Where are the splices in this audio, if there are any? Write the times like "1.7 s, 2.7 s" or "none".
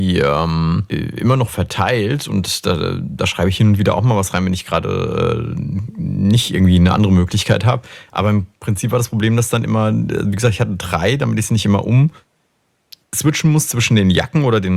none